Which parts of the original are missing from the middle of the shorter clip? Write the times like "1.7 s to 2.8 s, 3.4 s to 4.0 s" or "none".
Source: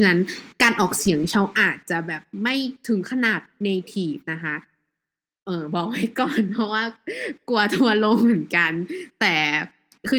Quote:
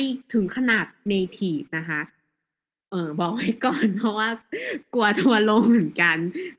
none